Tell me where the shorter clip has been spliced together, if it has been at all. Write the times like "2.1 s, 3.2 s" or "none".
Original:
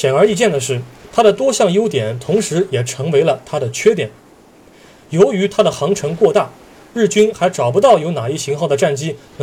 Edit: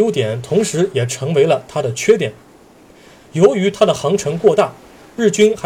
none